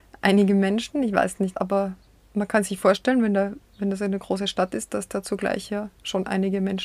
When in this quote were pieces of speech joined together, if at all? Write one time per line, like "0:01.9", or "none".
0:01.5